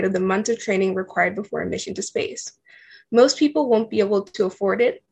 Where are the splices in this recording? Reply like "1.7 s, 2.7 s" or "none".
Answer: none